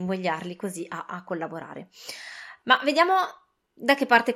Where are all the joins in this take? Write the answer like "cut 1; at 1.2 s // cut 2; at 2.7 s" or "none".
cut 1; at 2.6 s